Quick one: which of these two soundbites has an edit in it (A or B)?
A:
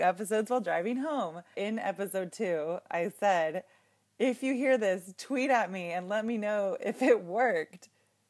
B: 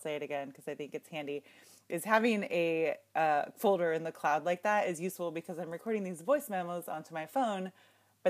A